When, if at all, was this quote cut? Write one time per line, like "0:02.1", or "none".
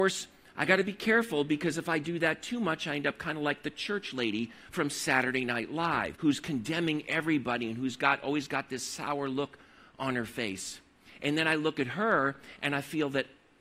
0:06.2